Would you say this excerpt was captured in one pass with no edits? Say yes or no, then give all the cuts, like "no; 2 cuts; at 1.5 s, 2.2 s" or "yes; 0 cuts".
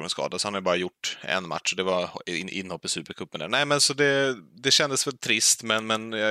no; 1 cut; at 3.8 s